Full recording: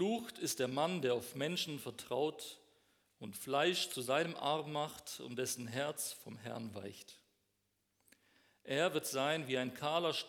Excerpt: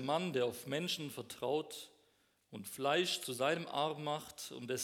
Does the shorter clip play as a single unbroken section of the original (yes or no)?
yes